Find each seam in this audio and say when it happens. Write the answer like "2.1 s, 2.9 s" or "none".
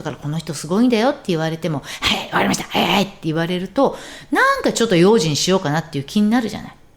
2.9 s